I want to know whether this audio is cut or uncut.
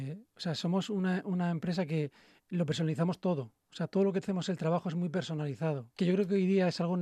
cut